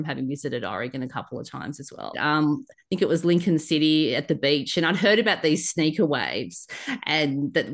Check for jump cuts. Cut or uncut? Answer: cut